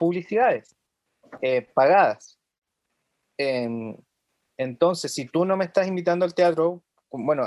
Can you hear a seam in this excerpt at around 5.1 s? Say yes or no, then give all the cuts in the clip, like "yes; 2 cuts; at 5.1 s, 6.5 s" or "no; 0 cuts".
no; 0 cuts